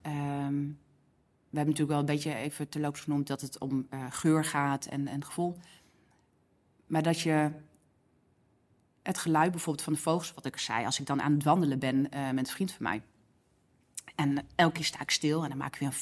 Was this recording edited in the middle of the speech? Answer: no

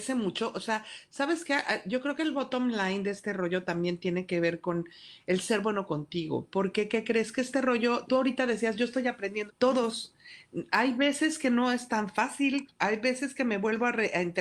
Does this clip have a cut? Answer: yes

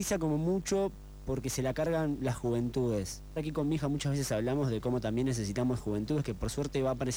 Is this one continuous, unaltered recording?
no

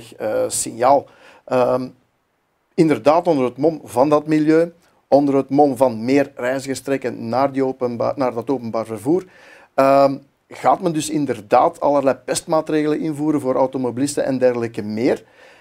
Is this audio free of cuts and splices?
yes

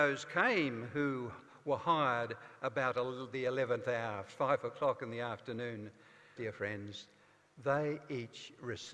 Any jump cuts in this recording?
yes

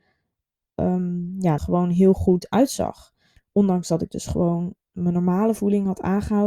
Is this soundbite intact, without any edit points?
no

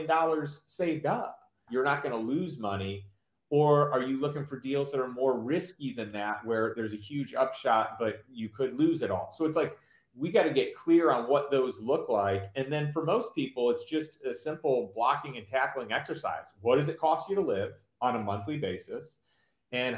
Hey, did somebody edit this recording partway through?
yes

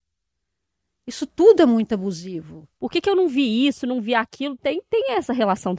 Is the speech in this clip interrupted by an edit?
yes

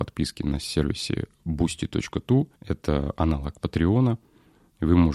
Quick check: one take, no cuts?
no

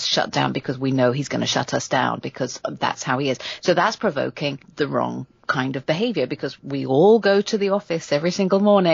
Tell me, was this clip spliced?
no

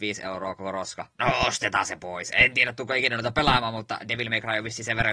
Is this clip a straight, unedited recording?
no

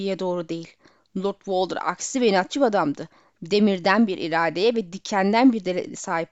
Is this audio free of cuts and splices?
yes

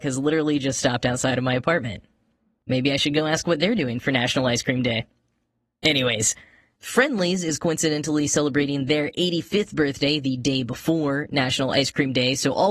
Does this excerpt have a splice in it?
no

